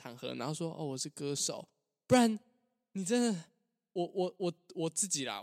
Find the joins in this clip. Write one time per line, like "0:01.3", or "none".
none